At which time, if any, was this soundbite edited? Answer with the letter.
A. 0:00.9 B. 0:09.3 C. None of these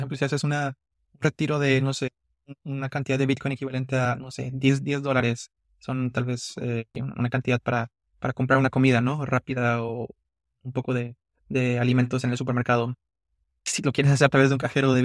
C